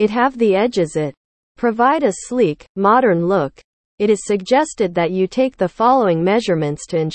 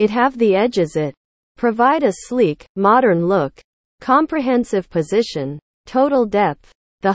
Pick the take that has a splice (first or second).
second